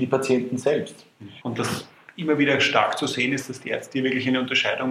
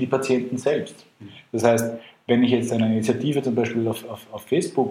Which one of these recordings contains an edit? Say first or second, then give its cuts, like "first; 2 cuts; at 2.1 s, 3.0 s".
first; 1 cut; at 1.4 s